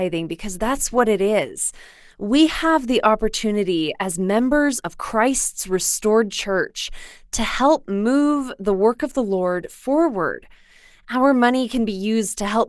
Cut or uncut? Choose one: uncut